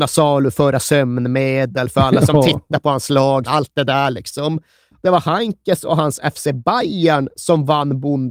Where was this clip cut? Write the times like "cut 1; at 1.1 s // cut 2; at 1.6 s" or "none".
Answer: cut 1; at 3.5 s // cut 2; at 5.0 s

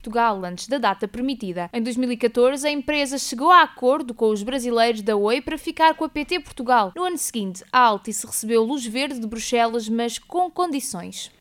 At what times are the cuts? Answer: none

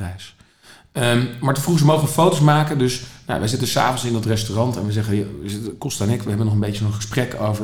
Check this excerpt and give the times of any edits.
none

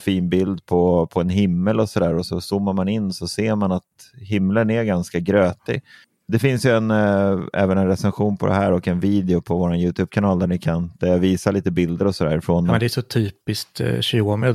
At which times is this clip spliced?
none

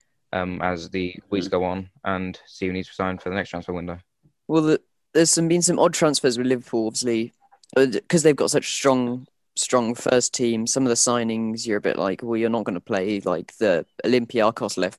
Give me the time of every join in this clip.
none

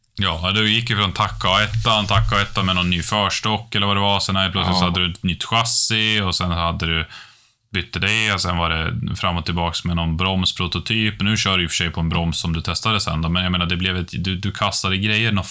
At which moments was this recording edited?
none

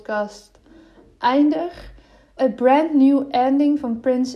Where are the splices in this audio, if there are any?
cut 1; at 2.4 s

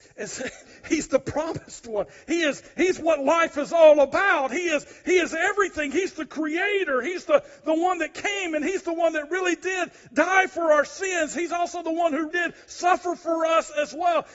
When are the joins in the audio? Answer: cut 1; at 12.3 s

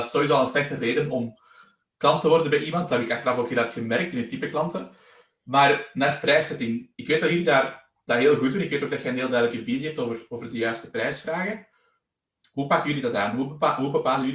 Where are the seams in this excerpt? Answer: cut 1; at 6.9 s

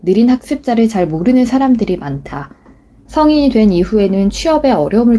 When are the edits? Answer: cut 1; at 3.1 s

